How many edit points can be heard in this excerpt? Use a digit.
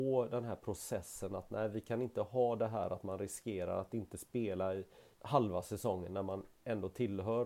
1